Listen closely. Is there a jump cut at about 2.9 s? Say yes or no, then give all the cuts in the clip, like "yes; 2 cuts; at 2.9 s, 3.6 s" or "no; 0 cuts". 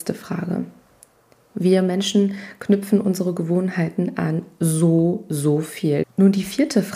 no; 2 cuts; at 1.5 s, 6.0 s